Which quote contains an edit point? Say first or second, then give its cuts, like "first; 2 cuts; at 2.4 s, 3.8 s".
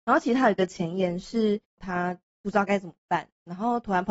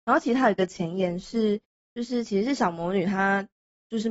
first; 1 cut; at 1.8 s